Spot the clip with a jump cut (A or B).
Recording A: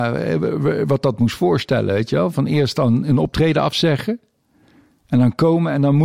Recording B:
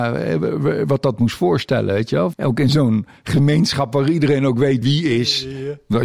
B